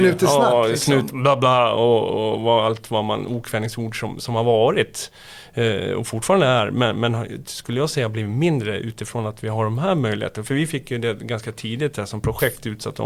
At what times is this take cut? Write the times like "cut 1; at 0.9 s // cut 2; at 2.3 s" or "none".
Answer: none